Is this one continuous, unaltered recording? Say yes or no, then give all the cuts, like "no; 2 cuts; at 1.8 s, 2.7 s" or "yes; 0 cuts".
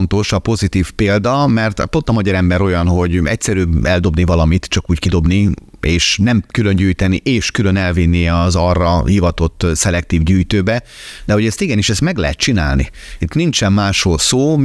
yes; 0 cuts